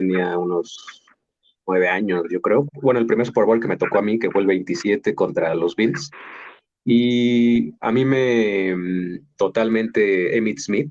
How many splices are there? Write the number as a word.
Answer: two